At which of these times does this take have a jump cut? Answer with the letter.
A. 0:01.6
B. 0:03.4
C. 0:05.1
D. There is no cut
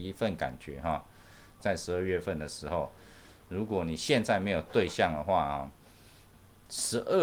A